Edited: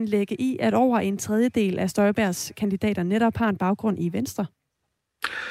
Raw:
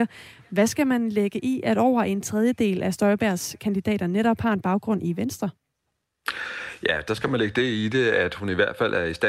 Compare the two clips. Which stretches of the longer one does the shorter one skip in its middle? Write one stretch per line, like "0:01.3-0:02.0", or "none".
none